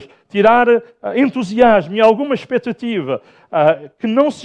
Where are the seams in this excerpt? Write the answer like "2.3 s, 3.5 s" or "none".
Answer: none